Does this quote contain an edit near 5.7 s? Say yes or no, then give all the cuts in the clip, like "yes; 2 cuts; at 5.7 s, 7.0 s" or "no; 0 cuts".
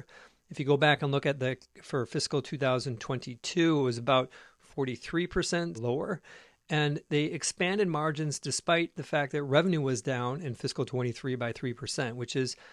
yes; 1 cut; at 5.7 s